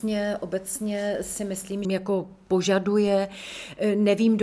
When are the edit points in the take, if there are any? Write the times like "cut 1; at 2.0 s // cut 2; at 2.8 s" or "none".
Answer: cut 1; at 1.8 s